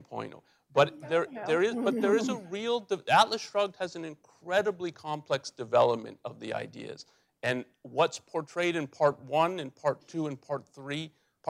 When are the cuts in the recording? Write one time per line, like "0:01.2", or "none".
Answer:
none